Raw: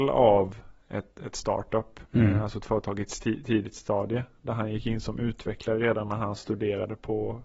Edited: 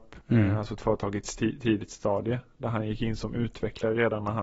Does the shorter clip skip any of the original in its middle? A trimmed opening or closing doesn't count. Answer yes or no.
no